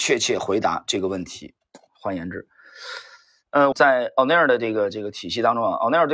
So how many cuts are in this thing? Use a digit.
2